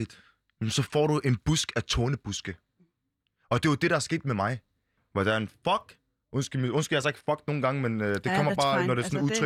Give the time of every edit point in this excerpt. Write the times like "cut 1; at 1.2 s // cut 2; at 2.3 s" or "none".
cut 1; at 5.0 s